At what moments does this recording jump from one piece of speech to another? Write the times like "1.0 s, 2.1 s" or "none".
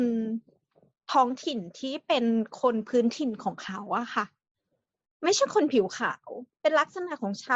6.5 s